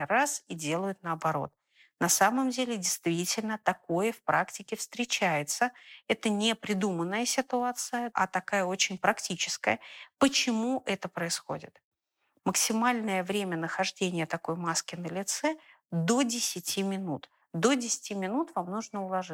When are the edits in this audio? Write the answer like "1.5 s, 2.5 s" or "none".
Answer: 8.1 s, 12.4 s, 17.4 s